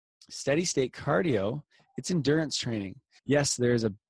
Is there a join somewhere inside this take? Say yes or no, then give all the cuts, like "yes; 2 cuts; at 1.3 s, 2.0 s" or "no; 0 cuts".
yes; 1 cut; at 3.2 s